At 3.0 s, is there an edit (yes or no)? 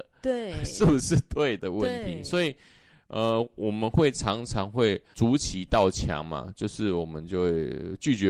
no